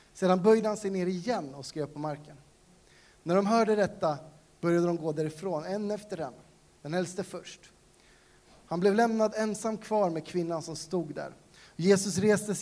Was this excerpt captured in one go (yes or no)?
yes